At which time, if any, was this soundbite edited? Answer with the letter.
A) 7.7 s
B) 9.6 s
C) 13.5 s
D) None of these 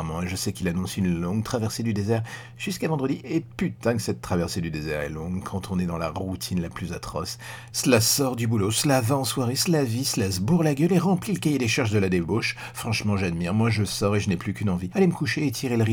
A